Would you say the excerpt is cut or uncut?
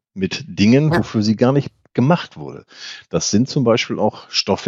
uncut